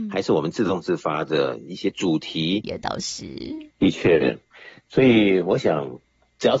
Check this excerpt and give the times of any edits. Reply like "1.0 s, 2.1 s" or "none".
2.6 s, 3.7 s